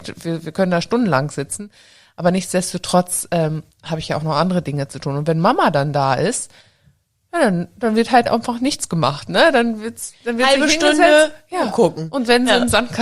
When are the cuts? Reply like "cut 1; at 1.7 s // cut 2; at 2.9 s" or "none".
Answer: none